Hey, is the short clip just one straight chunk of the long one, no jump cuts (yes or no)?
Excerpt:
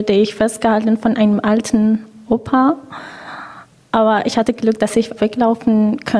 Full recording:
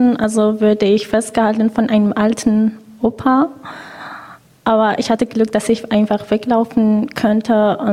no